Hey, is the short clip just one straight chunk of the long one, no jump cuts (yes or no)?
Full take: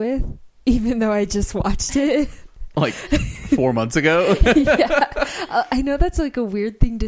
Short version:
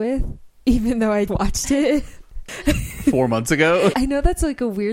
no